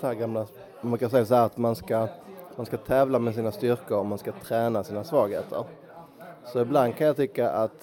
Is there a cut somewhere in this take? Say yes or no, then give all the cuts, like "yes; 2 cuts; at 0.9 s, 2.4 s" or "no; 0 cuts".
no; 0 cuts